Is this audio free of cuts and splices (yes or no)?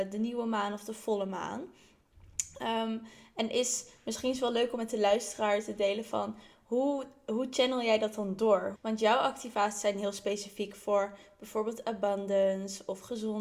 no